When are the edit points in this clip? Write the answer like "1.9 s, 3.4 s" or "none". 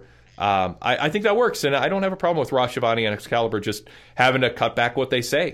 none